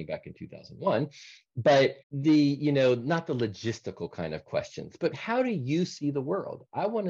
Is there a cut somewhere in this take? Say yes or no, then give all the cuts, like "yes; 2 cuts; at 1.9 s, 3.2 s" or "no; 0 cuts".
yes; 2 cuts; at 2.0 s, 5.1 s